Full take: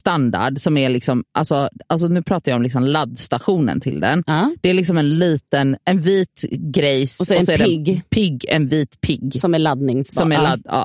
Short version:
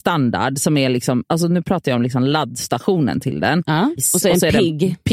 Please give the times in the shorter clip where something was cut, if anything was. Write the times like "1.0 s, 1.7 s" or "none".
1.2 s, 4.0 s